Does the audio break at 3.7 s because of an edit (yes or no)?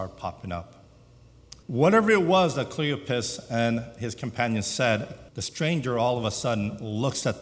no